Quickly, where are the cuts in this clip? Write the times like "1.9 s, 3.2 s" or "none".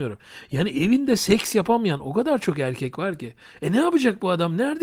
none